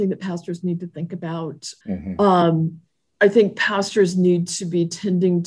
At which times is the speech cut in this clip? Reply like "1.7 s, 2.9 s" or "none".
1.8 s